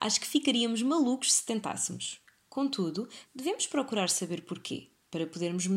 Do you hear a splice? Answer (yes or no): yes